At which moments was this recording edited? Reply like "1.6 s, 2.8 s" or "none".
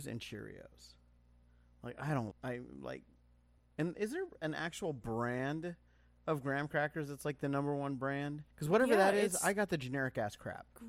2.3 s, 3.6 s, 8.5 s